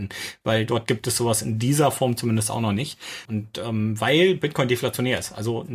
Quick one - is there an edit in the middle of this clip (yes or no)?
yes